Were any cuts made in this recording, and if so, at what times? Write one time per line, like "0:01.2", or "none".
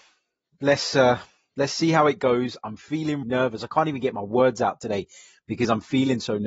0:03.2